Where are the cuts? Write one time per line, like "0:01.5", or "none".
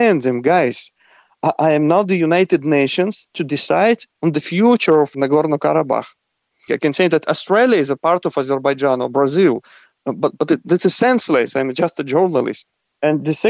0:06.7

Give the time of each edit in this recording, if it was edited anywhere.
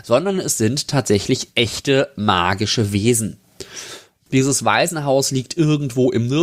0:04.3

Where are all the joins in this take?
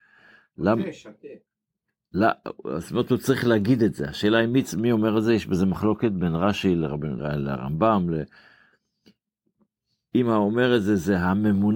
0:07.2

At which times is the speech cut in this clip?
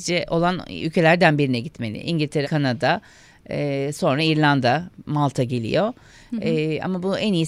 0:02.4

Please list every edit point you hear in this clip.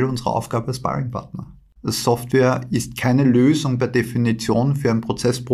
0:01.8

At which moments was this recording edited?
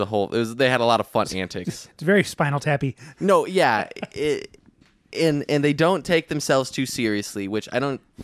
none

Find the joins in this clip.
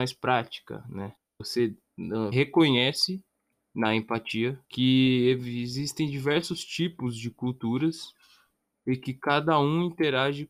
0:01.2
0:02.3
0:04.6

